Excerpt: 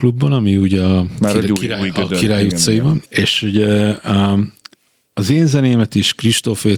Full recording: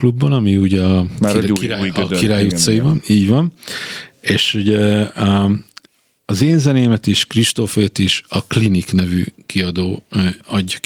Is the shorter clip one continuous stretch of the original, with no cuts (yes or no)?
no